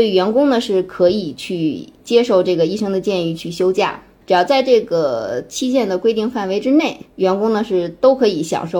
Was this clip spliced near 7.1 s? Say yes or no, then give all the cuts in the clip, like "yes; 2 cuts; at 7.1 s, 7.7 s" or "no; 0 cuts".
no; 1 cut; at 4.2 s